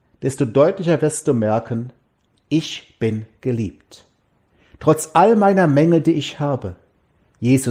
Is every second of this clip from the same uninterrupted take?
yes; 0 cuts

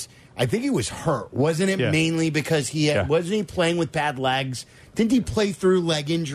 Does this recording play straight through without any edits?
yes; 0 cuts

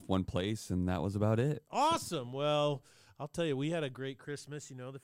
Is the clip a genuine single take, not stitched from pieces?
yes; 0 cuts

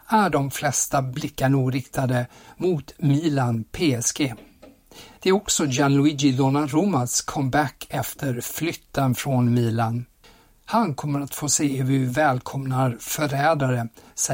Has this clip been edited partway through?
yes; 1 cut; at 5.2 s

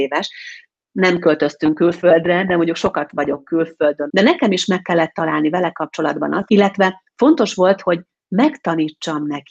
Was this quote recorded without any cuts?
no; 2 cuts; at 4.1 s, 6.5 s

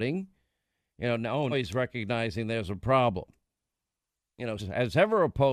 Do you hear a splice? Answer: yes; 2 cuts; at 1.5 s, 4.6 s

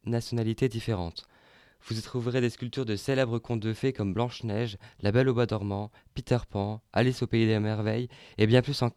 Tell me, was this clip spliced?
no; 0 cuts

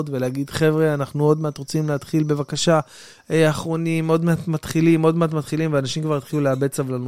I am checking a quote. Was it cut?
no; 0 cuts

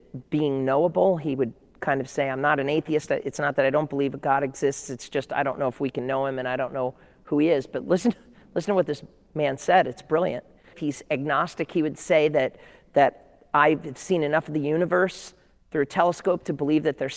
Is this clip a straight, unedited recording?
no; 1 cut; at 10.7 s

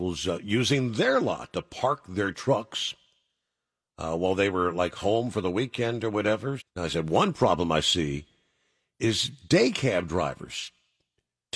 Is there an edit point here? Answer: yes; 1 cut; at 6.6 s

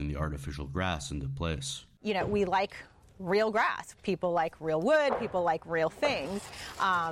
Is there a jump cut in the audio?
no; 0 cuts

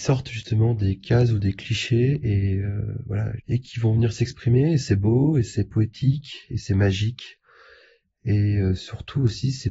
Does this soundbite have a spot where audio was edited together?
yes; 1 cut; at 3.4 s

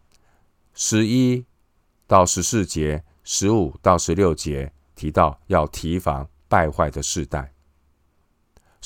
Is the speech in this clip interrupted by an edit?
no; 0 cuts

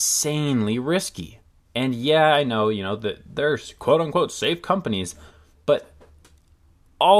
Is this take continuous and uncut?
no; 1 cut; at 1.7 s

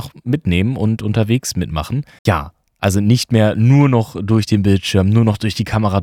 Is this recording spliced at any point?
yes; 1 cut; at 2.2 s

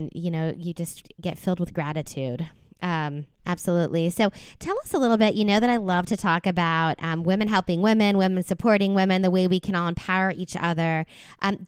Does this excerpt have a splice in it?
no; 0 cuts

